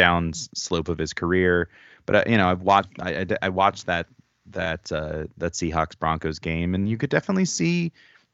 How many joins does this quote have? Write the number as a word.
zero